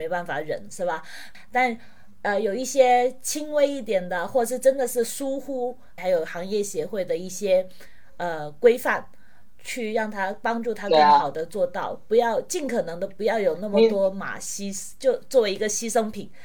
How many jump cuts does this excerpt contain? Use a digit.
1